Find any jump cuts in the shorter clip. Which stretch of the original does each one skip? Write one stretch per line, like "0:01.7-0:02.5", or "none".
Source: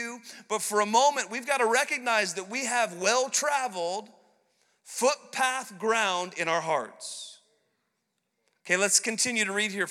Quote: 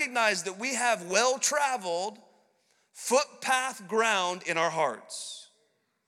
none